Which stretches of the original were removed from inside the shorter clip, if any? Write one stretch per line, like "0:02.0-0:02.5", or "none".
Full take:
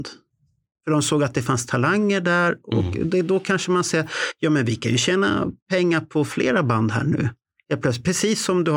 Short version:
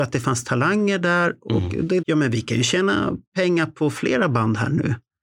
0:03.2-0:04.4

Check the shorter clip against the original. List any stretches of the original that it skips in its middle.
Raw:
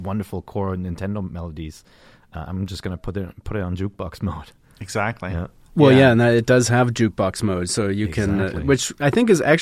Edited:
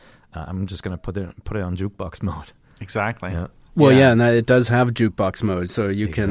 none

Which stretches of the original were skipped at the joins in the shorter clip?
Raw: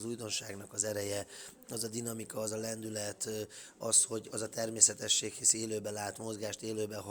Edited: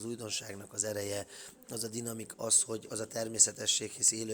0:02.3-0:03.7

